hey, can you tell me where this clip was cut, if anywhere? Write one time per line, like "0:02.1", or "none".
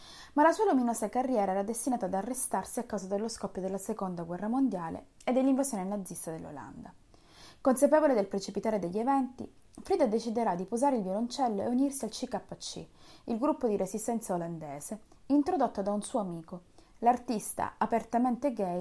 none